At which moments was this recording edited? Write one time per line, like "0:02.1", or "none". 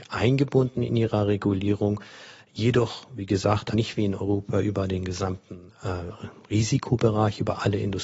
0:03.7